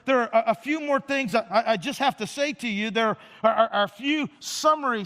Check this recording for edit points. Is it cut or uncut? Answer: uncut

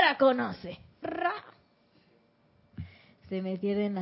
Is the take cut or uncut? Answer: cut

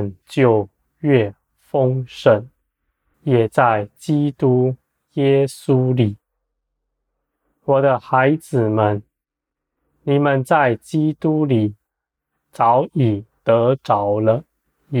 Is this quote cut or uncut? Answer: cut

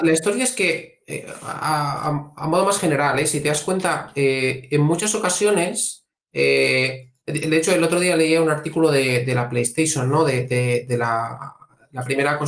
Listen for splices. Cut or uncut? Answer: uncut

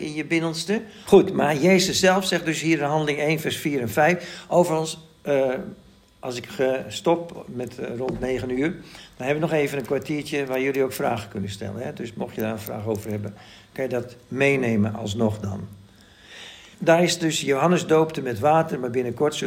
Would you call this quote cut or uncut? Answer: cut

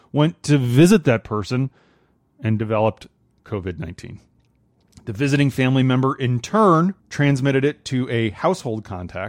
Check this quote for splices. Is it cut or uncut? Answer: cut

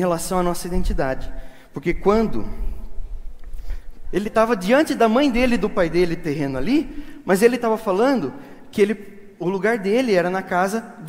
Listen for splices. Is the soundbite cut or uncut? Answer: cut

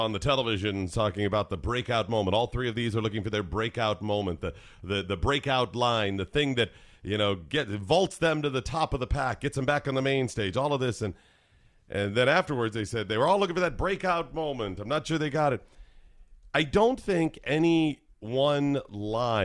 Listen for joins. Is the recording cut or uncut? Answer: uncut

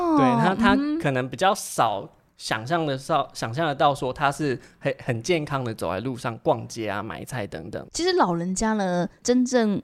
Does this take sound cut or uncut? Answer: cut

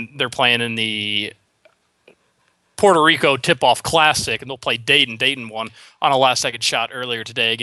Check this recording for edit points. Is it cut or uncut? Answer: uncut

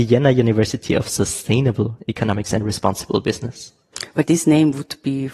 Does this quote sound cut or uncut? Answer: uncut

